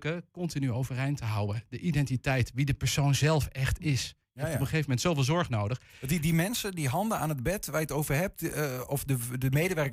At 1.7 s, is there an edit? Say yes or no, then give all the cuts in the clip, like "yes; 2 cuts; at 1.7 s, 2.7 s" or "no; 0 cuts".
no; 0 cuts